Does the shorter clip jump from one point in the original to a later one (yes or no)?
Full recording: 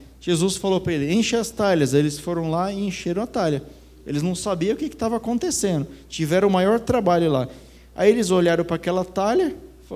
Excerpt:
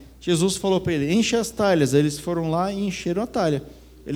no